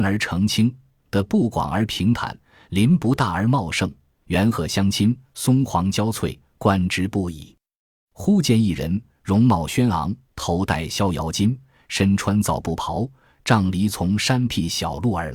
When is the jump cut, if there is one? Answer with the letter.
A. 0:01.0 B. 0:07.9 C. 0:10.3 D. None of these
C